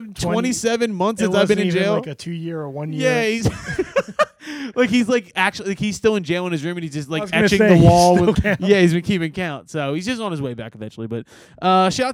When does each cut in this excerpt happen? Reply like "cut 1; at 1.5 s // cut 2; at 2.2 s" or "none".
cut 1; at 8.3 s